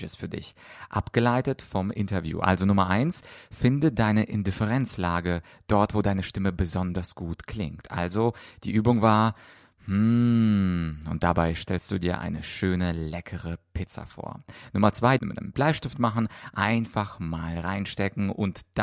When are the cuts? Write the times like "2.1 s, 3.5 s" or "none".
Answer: 15.2 s